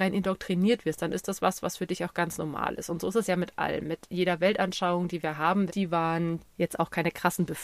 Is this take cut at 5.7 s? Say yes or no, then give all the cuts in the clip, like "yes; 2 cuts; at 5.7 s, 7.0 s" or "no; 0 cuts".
yes; 1 cut; at 5.7 s